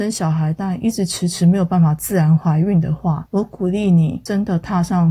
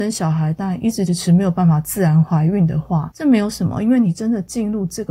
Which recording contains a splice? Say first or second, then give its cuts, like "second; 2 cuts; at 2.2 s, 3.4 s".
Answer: second; 2 cuts; at 1.1 s, 3.1 s